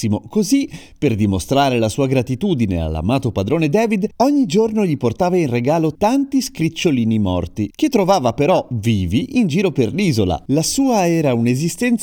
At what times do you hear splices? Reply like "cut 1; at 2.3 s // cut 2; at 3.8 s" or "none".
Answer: cut 1; at 6.0 s // cut 2; at 10.5 s